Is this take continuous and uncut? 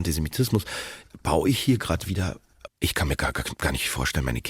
no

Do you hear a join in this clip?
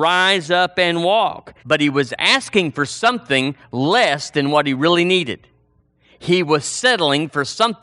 yes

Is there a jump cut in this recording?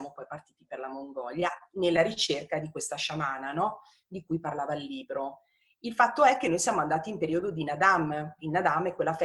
no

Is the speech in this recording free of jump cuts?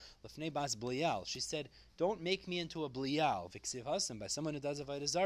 yes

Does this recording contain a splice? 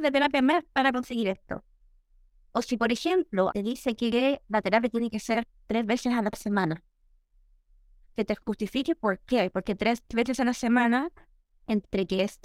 yes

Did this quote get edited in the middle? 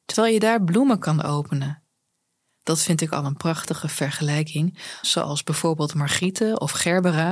yes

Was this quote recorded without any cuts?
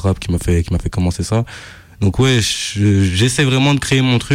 yes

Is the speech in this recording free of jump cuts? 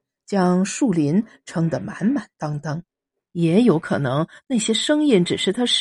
no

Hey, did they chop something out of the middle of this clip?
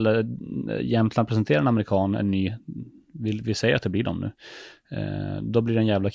no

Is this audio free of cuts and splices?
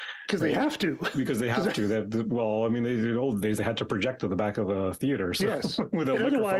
yes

